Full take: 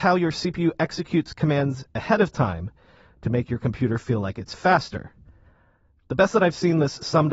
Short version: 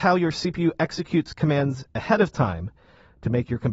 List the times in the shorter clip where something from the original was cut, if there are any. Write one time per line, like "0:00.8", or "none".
none